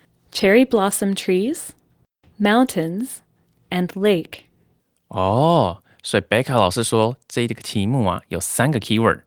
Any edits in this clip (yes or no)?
no